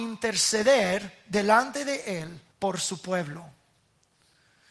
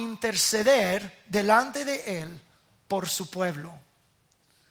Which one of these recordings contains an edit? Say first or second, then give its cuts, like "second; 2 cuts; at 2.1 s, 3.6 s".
first; 1 cut; at 2.5 s